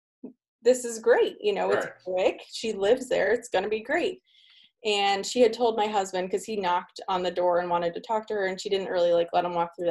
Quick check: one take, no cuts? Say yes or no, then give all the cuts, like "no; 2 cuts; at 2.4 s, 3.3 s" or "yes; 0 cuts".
yes; 0 cuts